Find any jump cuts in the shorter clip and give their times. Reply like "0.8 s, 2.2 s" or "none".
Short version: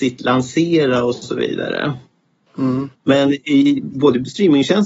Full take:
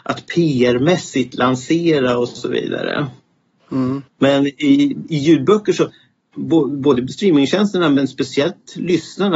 3.9 s